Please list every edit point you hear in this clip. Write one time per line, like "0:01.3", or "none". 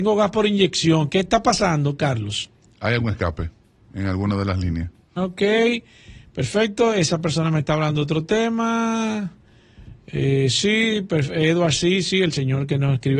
0:05.2